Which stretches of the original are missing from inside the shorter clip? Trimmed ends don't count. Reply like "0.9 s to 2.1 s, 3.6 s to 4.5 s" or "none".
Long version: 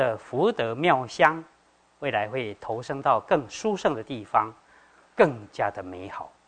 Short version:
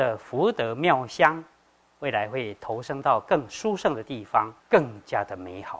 4.6 s to 5.1 s